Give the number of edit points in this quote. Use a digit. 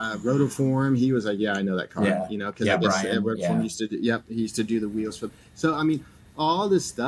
0